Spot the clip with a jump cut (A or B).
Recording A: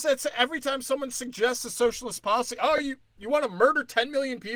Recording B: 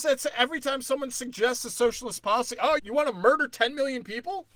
B